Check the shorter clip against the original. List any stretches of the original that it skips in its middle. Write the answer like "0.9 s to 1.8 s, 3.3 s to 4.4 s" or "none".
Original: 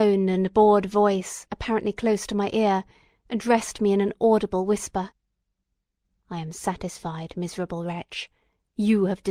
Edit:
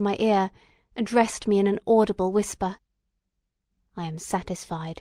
none